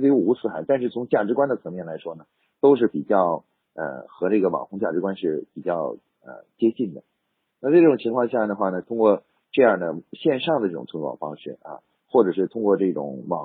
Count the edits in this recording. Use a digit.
2